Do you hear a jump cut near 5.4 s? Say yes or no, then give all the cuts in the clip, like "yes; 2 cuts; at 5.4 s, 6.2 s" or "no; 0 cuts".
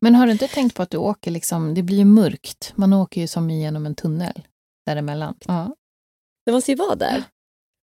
yes; 1 cut; at 5.4 s